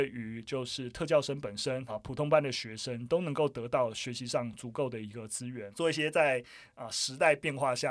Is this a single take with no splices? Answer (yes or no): no